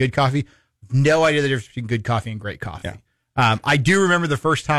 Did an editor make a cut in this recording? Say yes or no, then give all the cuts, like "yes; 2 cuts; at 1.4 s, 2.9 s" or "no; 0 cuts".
no; 0 cuts